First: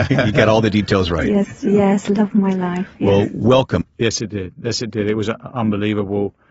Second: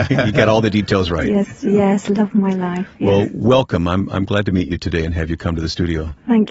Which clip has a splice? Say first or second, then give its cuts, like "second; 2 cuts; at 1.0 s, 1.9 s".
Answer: first; 1 cut; at 3.8 s